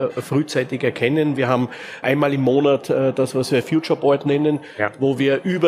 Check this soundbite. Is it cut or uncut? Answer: cut